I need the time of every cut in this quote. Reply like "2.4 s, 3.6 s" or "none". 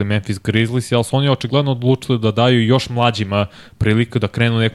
none